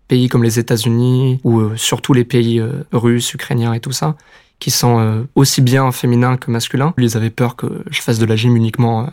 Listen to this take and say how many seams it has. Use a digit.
1